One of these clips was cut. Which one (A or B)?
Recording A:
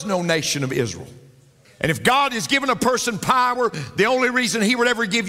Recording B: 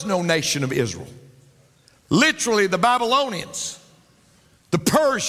A